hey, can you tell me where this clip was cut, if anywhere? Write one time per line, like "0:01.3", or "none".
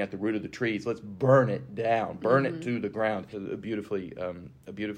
0:03.3